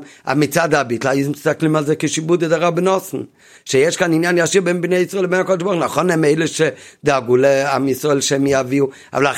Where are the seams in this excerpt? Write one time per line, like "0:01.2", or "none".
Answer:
none